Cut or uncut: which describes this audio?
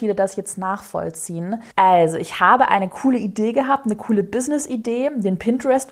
cut